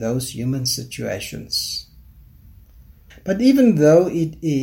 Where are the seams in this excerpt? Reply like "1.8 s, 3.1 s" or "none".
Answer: 3.1 s